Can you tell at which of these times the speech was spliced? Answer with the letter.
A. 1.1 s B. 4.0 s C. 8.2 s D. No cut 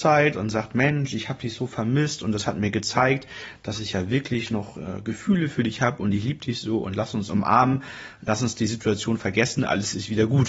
D